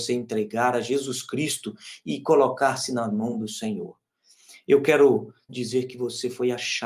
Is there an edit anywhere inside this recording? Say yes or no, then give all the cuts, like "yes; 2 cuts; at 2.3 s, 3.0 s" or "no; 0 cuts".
yes; 1 cut; at 5.5 s